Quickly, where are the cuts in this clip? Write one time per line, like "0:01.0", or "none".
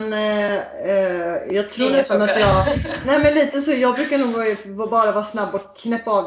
none